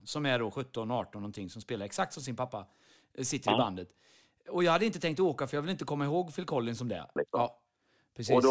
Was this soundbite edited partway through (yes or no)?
yes